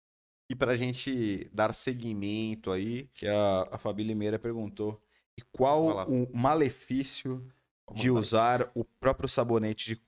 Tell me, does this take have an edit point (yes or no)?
no